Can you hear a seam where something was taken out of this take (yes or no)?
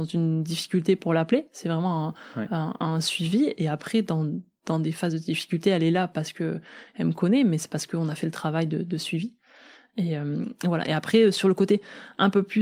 no